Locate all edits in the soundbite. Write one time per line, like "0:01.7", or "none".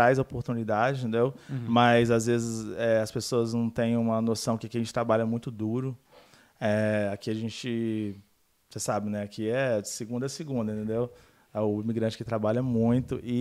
none